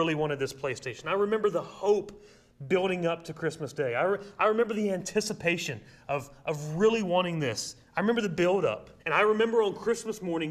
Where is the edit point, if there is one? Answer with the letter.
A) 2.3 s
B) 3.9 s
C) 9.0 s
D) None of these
C